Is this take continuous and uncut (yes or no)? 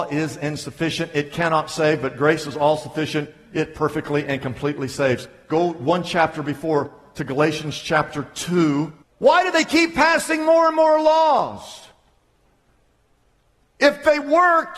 no